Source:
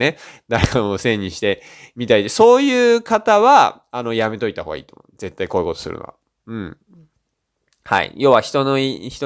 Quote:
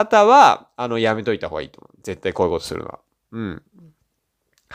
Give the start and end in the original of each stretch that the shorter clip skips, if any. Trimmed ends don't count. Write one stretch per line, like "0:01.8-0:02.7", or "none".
none

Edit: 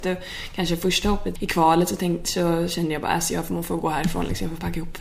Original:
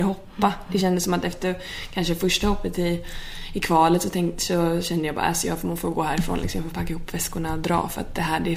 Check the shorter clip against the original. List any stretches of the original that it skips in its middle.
0:02.7-0:03.5

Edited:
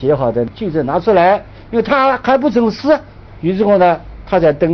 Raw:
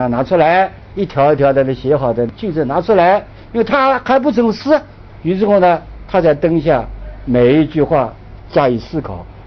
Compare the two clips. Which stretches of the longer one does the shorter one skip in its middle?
none

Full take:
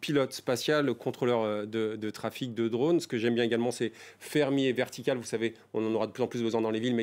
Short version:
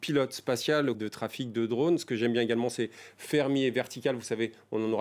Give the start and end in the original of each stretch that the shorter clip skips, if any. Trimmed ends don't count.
0:00.9-0:02.0

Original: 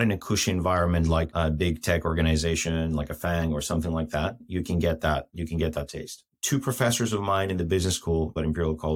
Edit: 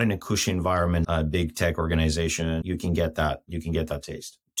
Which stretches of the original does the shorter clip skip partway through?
0:01.0-0:01.3
0:02.9-0:04.5

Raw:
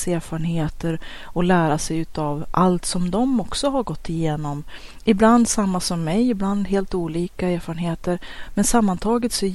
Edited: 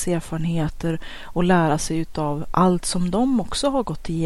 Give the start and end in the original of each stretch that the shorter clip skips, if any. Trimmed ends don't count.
none

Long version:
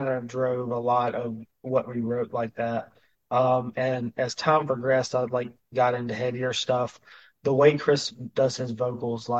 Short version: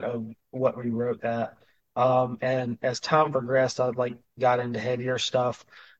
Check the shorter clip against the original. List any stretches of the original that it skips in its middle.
0:02.3-0:02.5

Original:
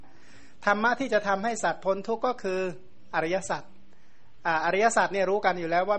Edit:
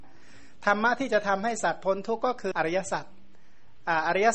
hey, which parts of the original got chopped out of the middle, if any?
0:02.5-0:03.1

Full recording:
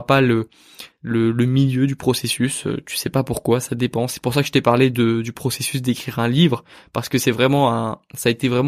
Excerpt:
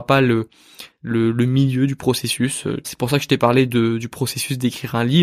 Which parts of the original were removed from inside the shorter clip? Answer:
0:02.8-0:04.1

